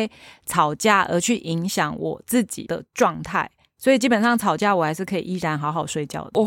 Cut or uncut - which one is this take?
uncut